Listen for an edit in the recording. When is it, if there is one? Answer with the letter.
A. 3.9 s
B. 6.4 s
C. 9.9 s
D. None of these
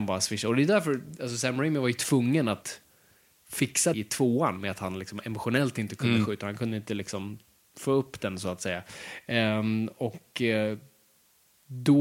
A